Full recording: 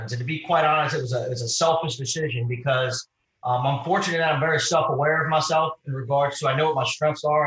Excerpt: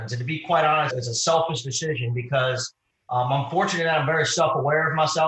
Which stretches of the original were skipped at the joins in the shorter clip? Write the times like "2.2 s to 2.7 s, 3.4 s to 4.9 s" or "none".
0.9 s to 1.2 s